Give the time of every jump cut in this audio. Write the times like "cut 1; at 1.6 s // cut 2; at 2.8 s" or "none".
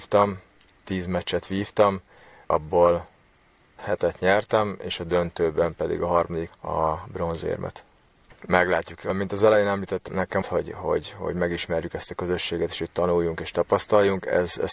cut 1; at 6.5 s // cut 2; at 8.3 s // cut 3; at 10.4 s